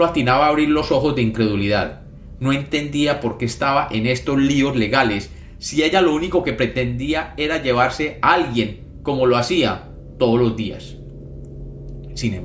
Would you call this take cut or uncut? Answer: uncut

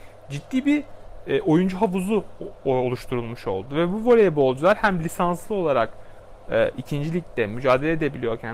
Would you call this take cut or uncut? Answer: uncut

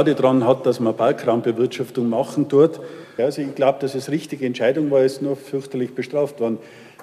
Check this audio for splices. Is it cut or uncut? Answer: cut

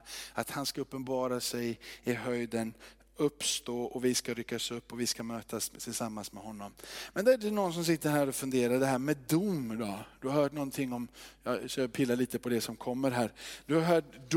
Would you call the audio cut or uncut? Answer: uncut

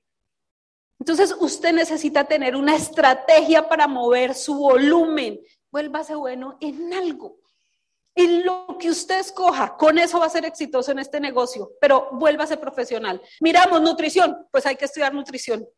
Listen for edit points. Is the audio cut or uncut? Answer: cut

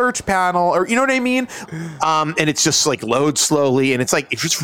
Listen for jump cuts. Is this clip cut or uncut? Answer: cut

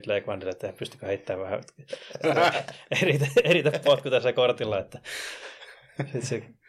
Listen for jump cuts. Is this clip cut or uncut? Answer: uncut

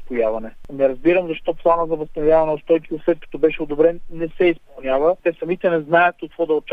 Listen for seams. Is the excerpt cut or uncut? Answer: cut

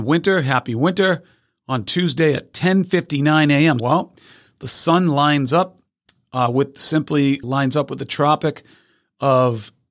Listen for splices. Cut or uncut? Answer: cut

